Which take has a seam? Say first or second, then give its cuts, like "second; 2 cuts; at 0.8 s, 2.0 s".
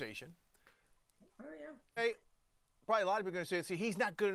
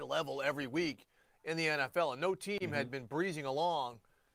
first; 1 cut; at 2.0 s